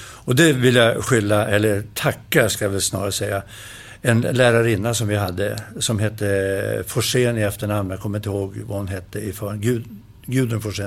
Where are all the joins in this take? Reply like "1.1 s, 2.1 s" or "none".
none